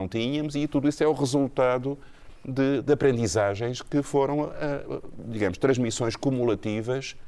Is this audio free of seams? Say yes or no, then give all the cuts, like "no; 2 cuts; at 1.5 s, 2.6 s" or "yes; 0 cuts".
yes; 0 cuts